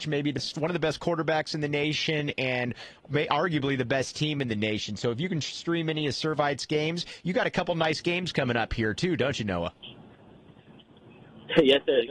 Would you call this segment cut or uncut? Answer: uncut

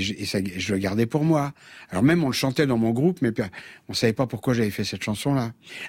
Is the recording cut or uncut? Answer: uncut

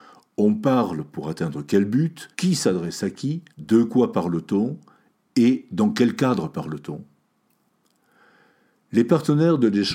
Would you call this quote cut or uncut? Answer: cut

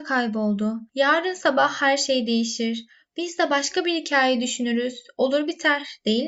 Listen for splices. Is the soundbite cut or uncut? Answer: cut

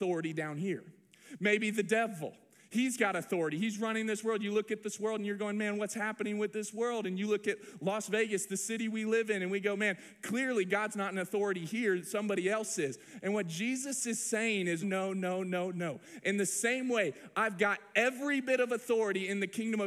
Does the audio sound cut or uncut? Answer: cut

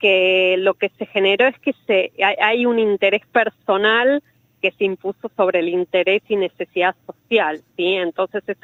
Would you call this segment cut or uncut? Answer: uncut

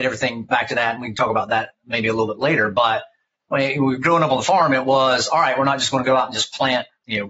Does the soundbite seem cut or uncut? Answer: uncut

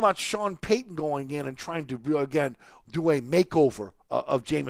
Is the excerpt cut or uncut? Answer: uncut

